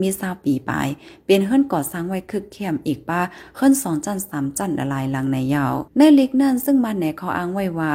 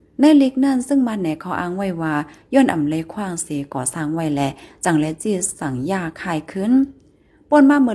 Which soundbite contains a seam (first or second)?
first